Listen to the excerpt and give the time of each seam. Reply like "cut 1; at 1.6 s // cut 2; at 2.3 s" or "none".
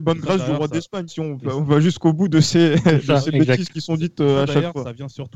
cut 1; at 1.1 s